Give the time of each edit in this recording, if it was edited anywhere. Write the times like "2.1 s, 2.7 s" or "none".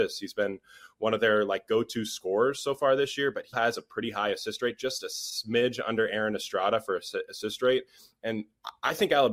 3.5 s

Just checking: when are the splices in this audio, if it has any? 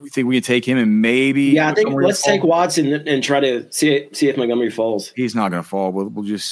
none

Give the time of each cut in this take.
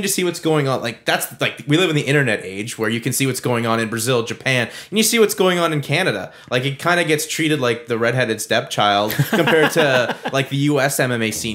none

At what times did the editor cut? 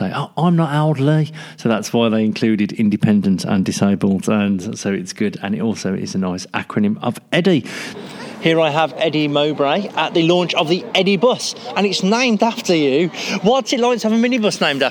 7.9 s

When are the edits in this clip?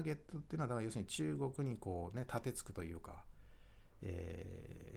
none

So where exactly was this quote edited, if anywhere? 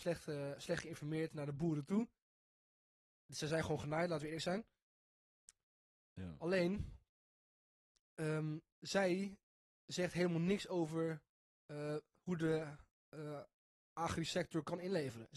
none

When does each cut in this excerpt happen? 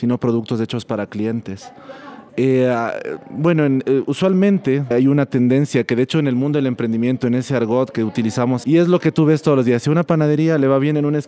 2.3 s, 4.9 s, 8.6 s

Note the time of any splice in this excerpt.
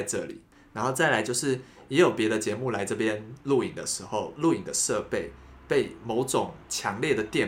none

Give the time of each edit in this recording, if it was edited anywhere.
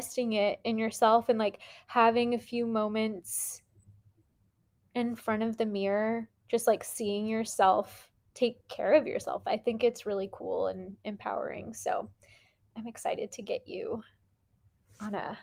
none

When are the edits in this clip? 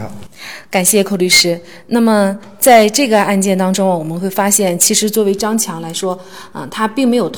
none

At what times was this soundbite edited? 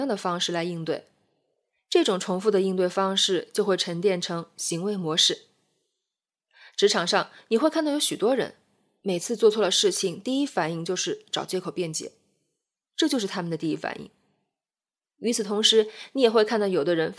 none

